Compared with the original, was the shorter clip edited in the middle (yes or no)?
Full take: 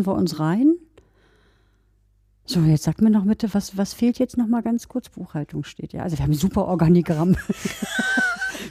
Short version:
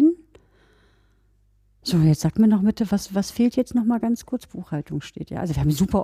no